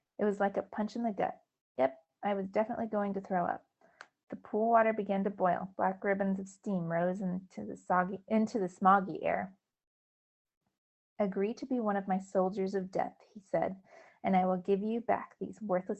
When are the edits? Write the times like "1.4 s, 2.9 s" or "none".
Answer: none